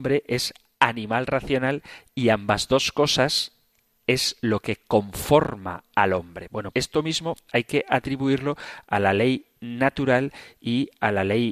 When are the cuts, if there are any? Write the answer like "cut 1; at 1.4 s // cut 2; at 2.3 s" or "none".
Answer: cut 1; at 3.9 s // cut 2; at 6.7 s